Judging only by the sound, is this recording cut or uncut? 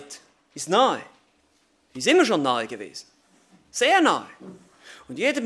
uncut